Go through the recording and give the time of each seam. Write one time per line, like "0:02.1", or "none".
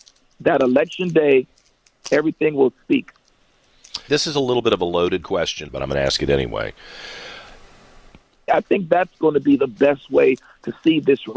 0:04.1
0:05.7
0:08.5